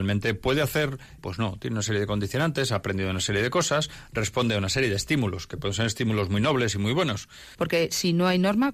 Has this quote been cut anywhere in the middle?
yes; 2 cuts; at 1.2 s, 7.5 s

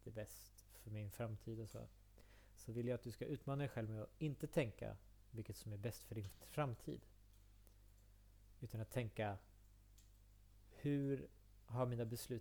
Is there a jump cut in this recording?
no; 0 cuts

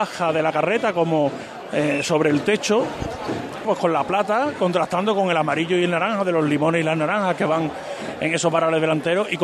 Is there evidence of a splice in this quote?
yes; 1 cut; at 3.6 s

